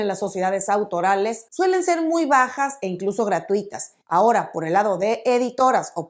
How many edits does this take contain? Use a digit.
1